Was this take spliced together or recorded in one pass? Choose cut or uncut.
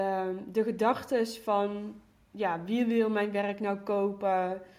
uncut